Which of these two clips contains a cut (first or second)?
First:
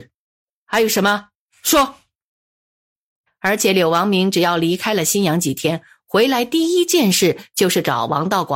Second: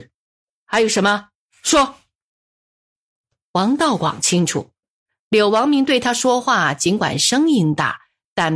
first